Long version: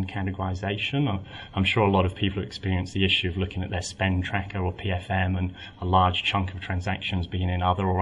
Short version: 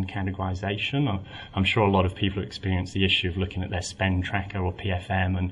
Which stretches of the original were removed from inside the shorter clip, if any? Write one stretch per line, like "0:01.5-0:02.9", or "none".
none